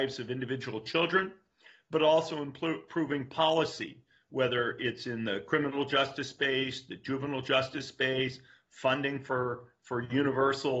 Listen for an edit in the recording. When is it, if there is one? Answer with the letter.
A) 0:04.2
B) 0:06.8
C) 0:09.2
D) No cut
D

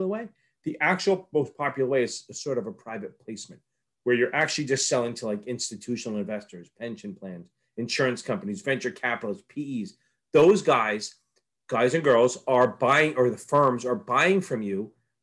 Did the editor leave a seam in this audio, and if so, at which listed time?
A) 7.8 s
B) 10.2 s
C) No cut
C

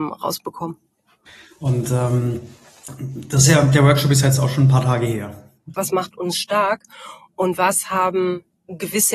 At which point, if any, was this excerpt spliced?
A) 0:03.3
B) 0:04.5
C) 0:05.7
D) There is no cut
C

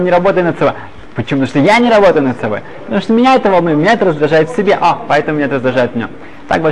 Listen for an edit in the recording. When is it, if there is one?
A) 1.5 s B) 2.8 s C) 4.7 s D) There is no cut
D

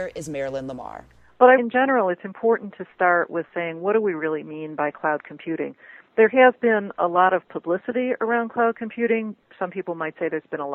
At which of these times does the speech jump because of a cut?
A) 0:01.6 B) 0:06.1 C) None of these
A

